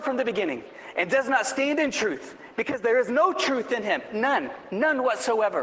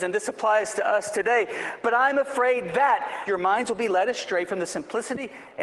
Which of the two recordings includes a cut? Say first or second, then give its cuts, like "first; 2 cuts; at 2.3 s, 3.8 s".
second; 1 cut; at 3.3 s